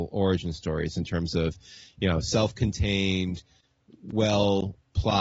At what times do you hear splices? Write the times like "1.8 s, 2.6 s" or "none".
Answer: none